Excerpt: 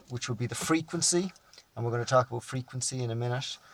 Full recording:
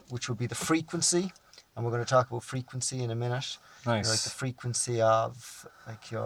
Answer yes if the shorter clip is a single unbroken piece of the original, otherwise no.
yes